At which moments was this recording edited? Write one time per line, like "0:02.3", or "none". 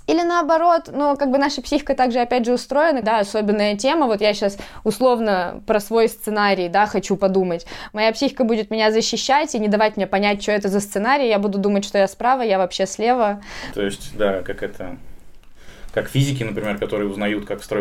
0:03.0